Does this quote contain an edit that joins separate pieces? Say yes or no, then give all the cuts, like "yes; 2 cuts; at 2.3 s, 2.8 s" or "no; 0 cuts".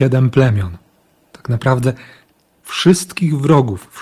no; 0 cuts